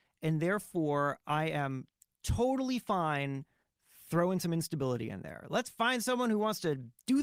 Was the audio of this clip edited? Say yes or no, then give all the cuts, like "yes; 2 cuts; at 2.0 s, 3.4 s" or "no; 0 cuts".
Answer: no; 0 cuts